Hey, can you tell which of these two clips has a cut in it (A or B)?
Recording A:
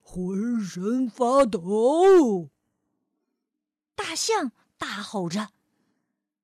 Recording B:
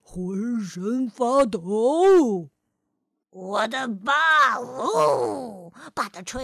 B